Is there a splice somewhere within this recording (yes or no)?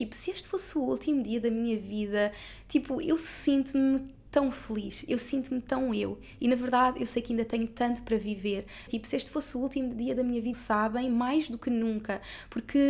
yes